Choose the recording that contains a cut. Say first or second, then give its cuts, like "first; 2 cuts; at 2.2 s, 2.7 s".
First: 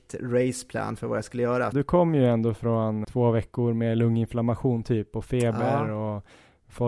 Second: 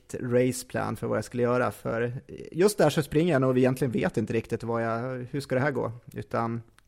first; 2 cuts; at 1.7 s, 3.0 s